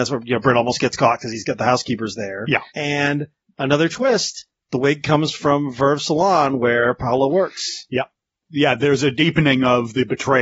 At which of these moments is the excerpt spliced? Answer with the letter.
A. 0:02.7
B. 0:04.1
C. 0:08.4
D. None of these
A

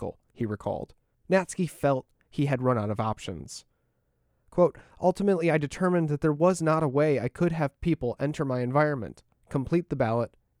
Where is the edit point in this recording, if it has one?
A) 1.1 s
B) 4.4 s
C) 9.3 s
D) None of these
A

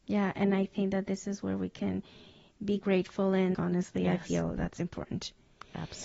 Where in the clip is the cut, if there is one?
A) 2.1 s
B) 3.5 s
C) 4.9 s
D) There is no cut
B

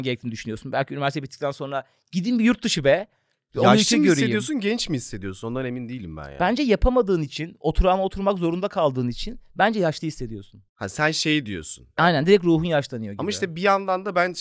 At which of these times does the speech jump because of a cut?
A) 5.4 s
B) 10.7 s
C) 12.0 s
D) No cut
C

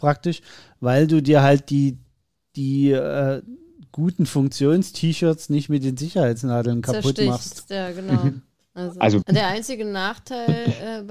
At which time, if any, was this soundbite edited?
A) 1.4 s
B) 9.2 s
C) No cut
B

